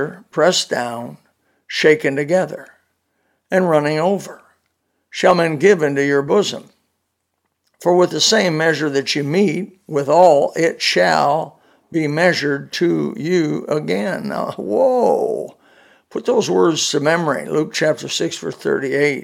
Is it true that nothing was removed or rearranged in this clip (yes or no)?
yes